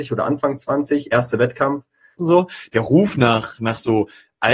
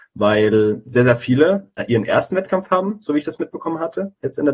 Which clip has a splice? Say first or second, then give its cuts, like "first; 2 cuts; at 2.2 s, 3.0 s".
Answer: first; 1 cut; at 2.2 s